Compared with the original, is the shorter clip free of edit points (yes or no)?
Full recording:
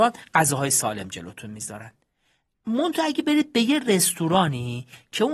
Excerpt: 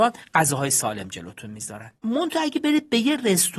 no